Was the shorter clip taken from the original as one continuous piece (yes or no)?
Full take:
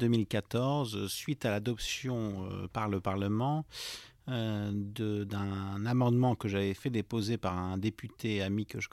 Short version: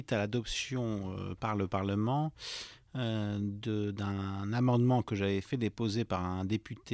yes